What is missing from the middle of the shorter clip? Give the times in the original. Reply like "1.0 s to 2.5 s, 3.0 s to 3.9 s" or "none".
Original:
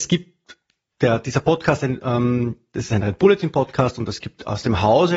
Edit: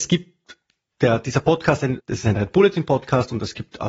2.0 s to 2.7 s